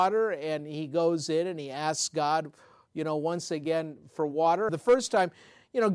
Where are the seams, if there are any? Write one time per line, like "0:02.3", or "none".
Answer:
0:04.7